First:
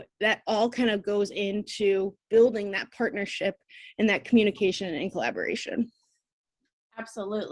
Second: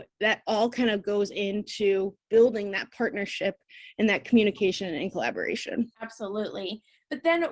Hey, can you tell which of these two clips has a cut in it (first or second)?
second